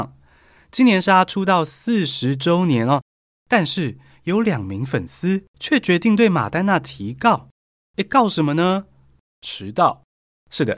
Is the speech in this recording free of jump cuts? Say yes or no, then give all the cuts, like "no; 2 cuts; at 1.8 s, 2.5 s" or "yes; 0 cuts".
yes; 0 cuts